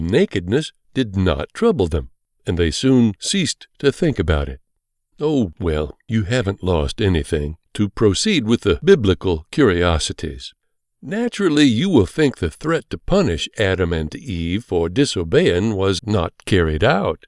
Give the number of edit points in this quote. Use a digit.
3